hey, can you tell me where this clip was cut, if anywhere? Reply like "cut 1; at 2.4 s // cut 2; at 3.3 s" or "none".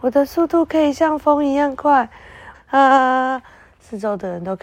cut 1; at 2.5 s